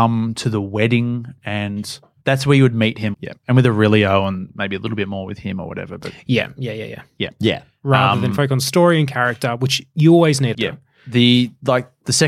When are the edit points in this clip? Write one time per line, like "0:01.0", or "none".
0:03.1
0:07.2
0:10.5